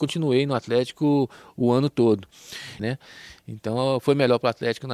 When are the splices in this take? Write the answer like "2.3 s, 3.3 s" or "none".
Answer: 2.8 s